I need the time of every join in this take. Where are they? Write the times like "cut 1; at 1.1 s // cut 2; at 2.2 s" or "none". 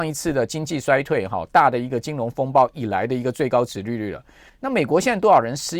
cut 1; at 4.5 s

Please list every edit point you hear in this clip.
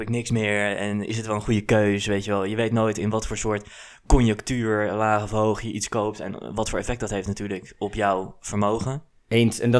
none

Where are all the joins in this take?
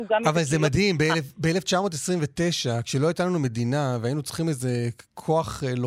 none

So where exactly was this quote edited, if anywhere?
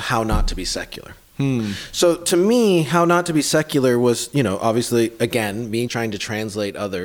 cut 1; at 5.9 s

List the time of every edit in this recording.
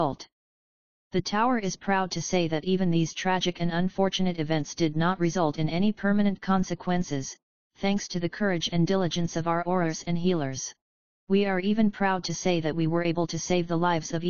cut 1; at 11.1 s

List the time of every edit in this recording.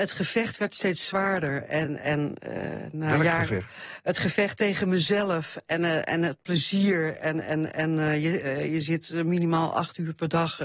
cut 1; at 1.8 s

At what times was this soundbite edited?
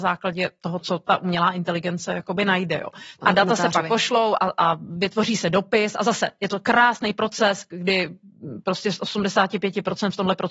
cut 1; at 3.2 s

